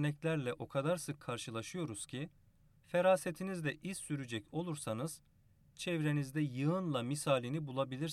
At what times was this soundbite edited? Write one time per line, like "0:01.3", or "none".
0:02.7